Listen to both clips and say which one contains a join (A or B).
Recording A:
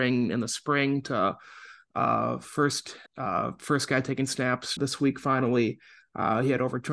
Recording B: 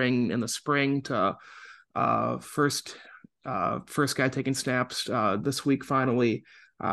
A